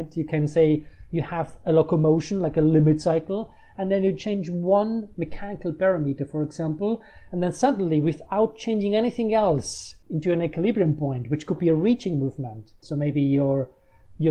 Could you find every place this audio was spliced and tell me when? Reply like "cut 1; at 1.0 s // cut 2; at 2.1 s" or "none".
cut 1; at 10.0 s // cut 2; at 12.8 s

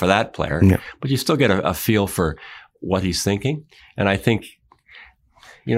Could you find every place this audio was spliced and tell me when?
none

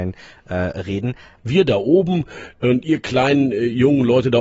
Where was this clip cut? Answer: cut 1; at 1.4 s

